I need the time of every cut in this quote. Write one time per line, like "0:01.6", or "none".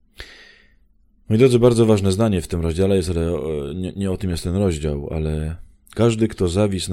none